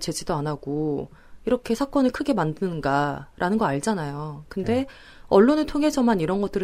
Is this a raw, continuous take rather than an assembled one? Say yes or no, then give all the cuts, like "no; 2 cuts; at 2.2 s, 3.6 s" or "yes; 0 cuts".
yes; 0 cuts